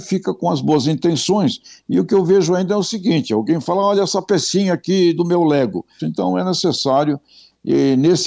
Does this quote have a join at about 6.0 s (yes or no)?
yes